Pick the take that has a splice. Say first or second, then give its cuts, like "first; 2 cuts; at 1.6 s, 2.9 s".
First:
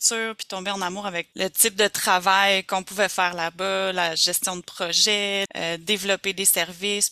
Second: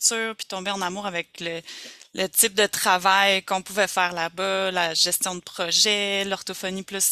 first; 2 cuts; at 1.3 s, 5.5 s